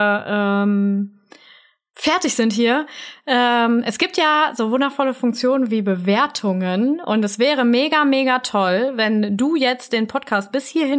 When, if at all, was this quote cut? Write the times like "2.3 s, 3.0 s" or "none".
none

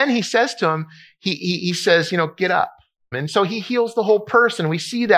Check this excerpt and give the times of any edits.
3.1 s

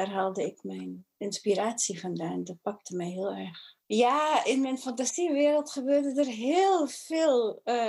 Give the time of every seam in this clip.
3.8 s

